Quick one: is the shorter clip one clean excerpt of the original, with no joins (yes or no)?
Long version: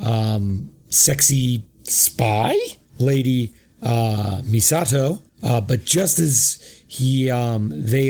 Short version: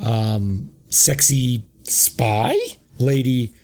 yes